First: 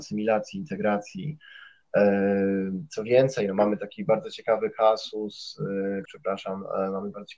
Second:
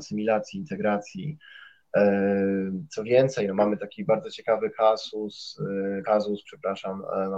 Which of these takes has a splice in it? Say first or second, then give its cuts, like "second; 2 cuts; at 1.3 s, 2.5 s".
first; 1 cut; at 6.0 s